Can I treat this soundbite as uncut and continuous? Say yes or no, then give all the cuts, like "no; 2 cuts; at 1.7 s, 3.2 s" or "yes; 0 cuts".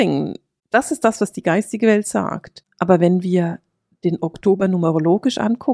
yes; 0 cuts